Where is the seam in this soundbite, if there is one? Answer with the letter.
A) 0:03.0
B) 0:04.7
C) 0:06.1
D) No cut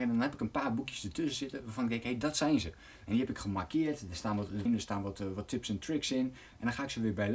B